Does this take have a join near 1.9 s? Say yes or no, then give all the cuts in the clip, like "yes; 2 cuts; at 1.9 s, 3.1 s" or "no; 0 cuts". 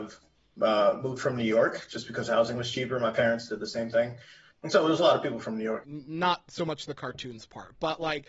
no; 2 cuts; at 4.5 s, 5.8 s